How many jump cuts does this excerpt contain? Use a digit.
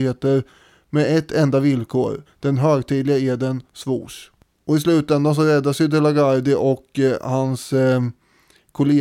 1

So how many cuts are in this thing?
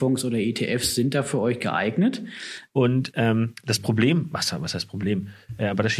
1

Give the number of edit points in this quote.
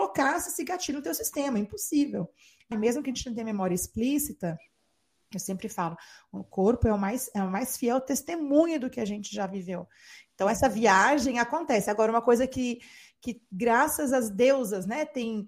1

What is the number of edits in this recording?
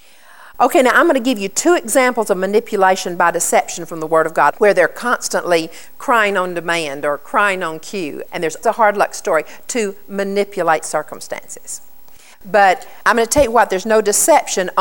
3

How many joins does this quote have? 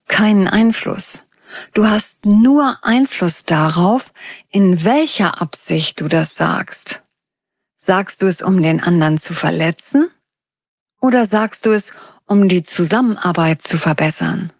0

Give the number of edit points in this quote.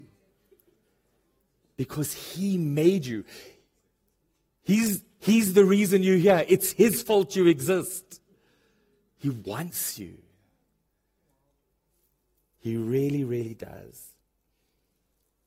0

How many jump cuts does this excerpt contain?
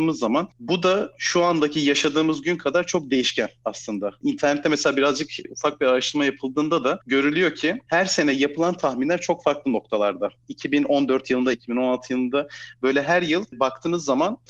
1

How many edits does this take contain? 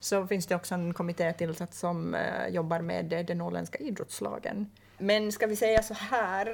1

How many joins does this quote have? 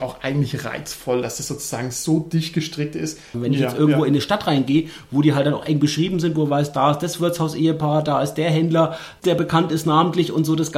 2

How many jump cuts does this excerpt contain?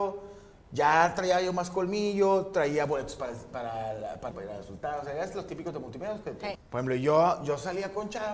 2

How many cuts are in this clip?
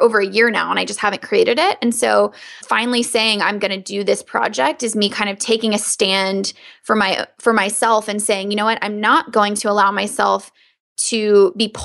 1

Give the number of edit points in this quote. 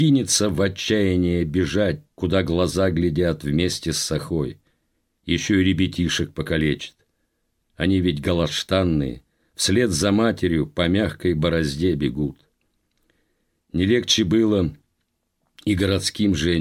1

